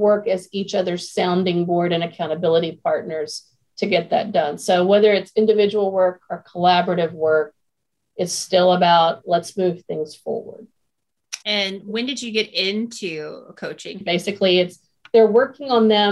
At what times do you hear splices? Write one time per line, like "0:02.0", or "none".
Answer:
0:11.4
0:14.0

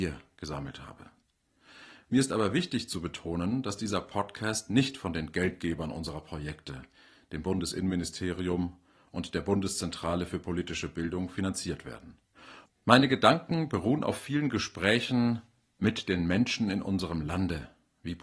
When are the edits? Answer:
0:12.7

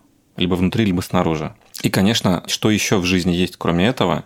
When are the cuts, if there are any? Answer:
0:02.5

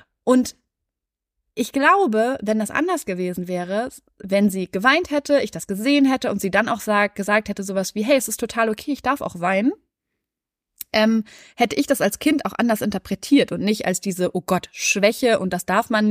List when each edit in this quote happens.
none

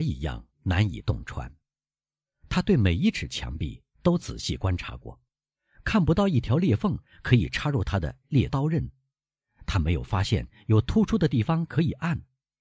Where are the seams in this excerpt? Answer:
0:08.5

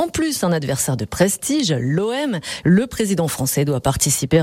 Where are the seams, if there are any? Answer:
0:02.6

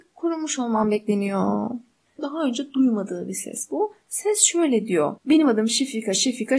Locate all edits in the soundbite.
0:02.2
0:05.2

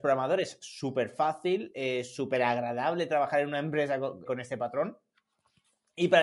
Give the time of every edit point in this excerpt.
0:04.3

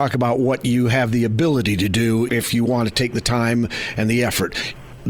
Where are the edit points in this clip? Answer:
0:02.3

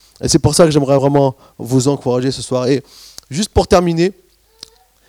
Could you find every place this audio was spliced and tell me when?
none

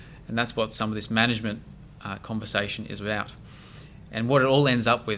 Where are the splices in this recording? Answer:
none

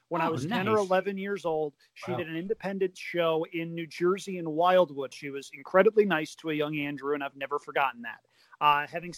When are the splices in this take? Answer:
0:05.1

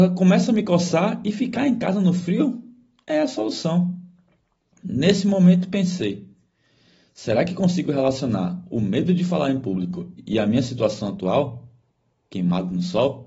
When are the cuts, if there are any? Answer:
none

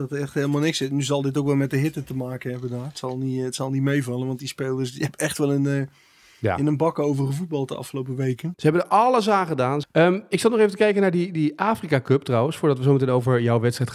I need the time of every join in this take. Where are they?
0:08.5
0:09.8

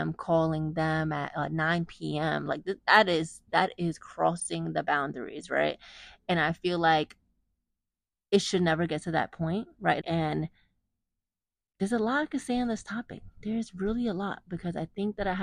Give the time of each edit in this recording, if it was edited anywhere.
0:10.0

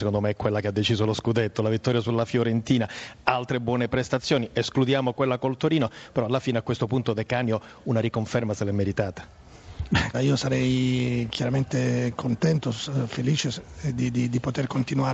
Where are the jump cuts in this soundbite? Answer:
0:10.1

